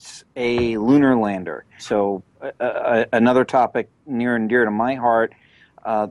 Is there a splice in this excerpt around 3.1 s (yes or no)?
no